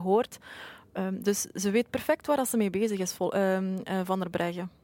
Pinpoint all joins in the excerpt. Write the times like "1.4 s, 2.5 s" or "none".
none